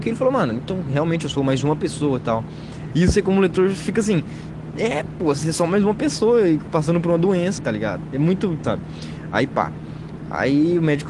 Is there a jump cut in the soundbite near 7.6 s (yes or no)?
yes